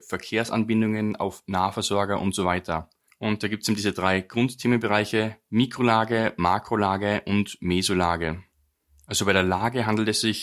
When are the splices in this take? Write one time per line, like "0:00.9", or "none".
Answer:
0:03.1